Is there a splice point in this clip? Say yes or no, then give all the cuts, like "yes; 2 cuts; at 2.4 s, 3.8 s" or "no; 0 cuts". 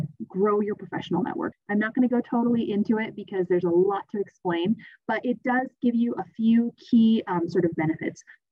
yes; 1 cut; at 1.5 s